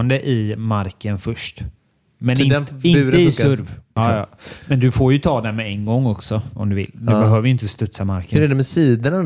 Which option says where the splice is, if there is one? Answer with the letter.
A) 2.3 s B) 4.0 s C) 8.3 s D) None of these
B